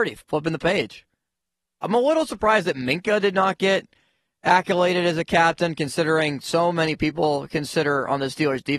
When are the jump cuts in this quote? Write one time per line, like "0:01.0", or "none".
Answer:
0:01.8